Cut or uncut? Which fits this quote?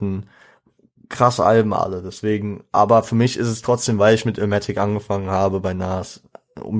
uncut